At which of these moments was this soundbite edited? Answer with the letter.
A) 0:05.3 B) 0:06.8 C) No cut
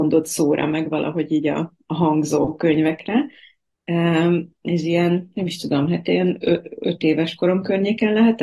C